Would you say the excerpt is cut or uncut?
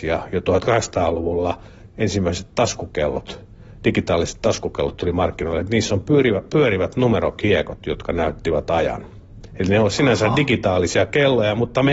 uncut